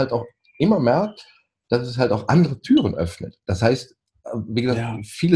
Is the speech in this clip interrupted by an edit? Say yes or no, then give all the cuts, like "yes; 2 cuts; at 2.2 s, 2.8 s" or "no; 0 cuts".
no; 0 cuts